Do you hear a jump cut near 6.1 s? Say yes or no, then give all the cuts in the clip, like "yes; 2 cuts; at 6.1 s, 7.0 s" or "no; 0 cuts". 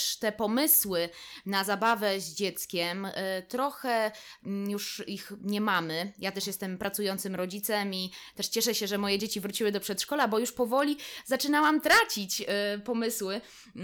no; 0 cuts